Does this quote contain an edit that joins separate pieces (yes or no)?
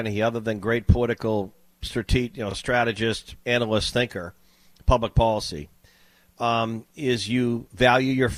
no